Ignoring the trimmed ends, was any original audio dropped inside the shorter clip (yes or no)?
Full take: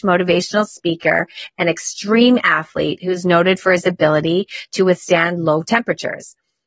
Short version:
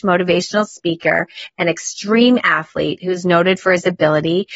no